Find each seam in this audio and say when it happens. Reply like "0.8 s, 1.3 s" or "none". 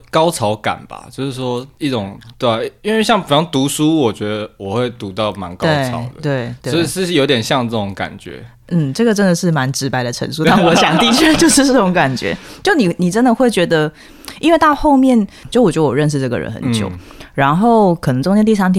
15.4 s